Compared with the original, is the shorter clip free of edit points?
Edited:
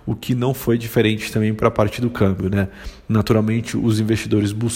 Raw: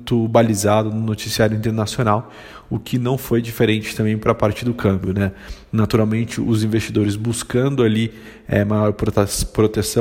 yes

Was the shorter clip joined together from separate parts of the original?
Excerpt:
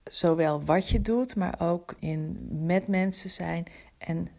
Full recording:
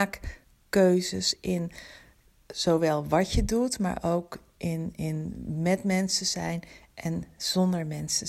yes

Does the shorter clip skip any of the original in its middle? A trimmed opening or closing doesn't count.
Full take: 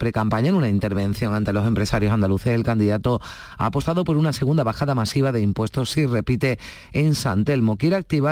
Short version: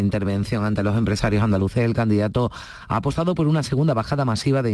no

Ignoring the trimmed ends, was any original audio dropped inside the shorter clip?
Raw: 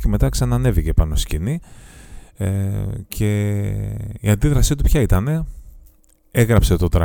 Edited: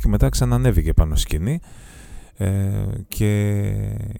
no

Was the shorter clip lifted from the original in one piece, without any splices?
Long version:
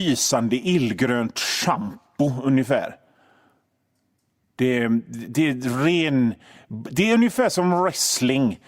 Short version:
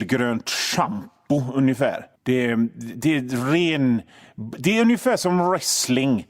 no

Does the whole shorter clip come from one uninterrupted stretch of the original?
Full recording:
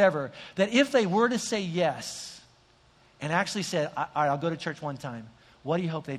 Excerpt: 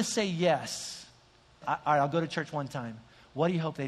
no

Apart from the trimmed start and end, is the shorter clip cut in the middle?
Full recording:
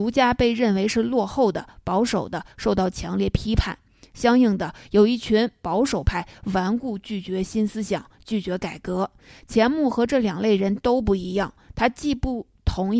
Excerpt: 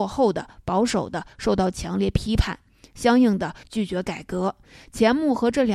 yes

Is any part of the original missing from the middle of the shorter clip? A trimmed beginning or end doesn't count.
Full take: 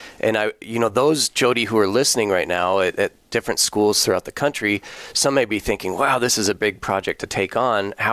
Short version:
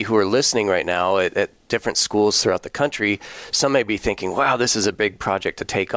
no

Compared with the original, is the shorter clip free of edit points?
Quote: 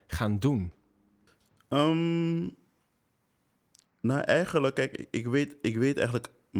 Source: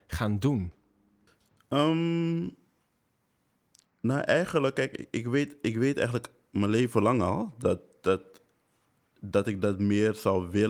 yes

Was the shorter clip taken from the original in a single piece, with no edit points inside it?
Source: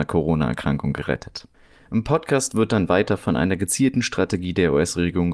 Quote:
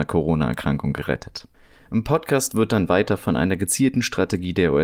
yes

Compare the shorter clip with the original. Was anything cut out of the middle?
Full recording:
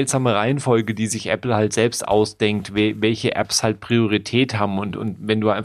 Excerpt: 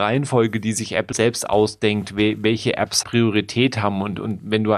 yes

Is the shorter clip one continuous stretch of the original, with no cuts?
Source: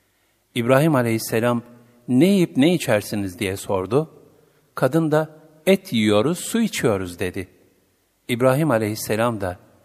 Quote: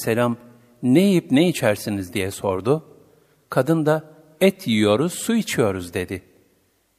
yes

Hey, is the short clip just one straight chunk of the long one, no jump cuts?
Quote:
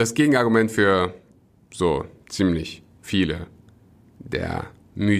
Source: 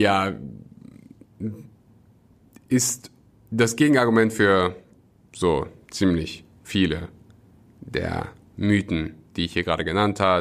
yes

